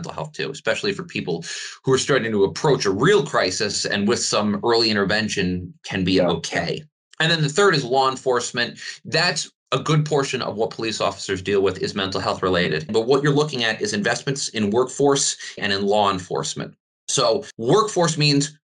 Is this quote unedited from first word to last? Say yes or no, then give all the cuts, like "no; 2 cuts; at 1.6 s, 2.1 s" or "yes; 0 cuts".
no; 3 cuts; at 9.6 s, 12.9 s, 15.6 s